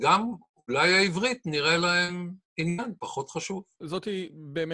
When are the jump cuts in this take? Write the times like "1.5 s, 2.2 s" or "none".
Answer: 3.8 s